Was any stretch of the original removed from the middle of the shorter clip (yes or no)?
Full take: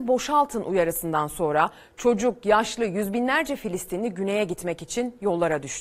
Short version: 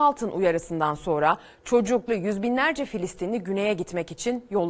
yes